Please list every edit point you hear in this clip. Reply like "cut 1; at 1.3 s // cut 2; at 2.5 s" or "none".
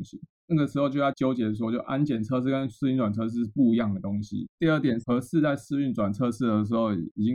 cut 1; at 4.5 s